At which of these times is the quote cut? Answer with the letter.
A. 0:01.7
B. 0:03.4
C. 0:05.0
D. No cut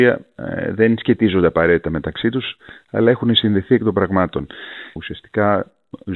C